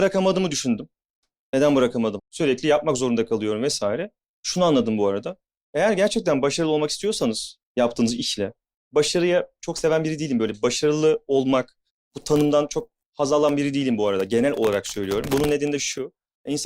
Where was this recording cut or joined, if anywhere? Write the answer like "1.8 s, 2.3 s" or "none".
2.2 s